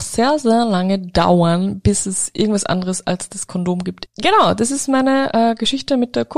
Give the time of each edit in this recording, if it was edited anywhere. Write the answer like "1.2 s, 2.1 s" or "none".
4.1 s